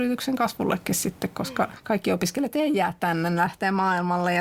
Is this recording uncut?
yes; 0 cuts

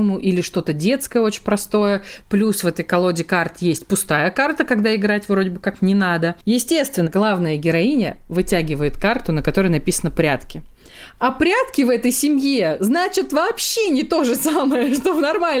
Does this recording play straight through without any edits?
no; 1 cut; at 7.1 s

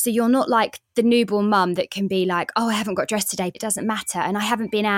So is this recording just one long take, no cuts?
no; 1 cut; at 3.5 s

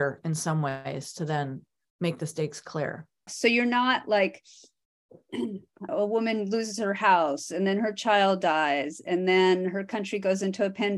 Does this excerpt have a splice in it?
yes; 2 cuts; at 3.3 s, 5.9 s

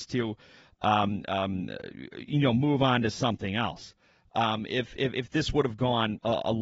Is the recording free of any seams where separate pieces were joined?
no; 1 cut; at 4.3 s

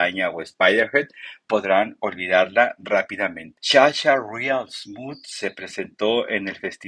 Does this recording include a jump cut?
yes; 1 cut; at 3.6 s

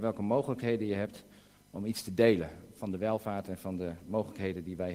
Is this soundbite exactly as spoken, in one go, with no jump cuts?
yes; 0 cuts

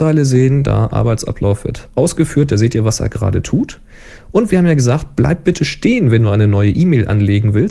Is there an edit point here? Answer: no; 0 cuts

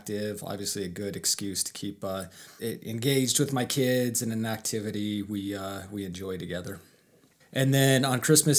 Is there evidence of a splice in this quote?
yes; 2 cuts; at 2.6 s, 7.4 s

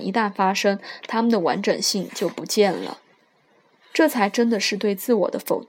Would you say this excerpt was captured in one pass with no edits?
yes; 0 cuts

